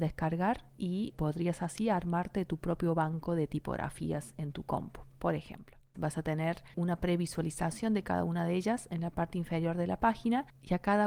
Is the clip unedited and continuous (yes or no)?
no